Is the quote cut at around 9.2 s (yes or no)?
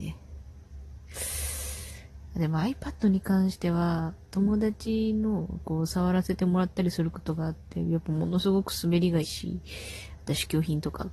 yes